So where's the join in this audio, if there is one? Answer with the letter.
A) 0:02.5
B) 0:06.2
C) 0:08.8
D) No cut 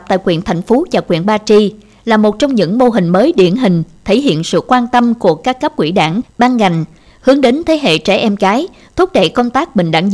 B